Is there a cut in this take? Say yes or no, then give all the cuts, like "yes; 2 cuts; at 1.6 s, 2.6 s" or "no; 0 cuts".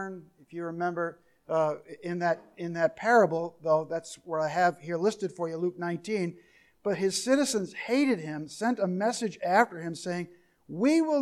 no; 0 cuts